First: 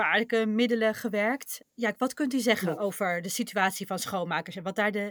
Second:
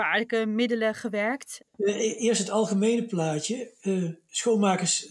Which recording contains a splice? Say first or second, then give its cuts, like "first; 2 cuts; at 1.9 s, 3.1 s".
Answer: second; 1 cut; at 1.7 s